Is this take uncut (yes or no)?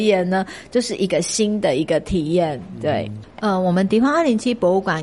no